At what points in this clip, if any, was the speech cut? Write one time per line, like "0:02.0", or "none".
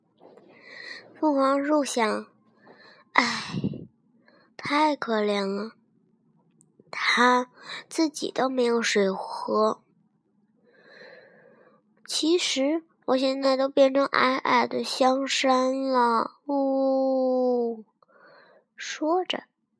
0:13.0